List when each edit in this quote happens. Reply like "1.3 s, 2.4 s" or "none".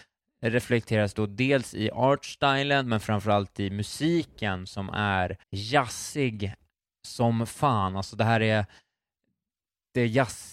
5.4 s